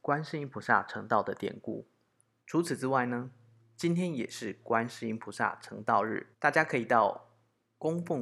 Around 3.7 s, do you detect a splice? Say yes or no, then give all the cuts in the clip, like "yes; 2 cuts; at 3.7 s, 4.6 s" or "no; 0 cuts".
no; 2 cuts; at 2.4 s, 6.3 s